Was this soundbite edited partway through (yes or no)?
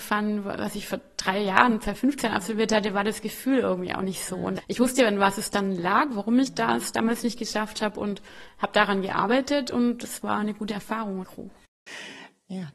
yes